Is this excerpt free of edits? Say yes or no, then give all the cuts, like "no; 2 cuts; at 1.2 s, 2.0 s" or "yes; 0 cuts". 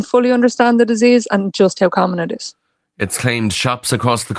yes; 0 cuts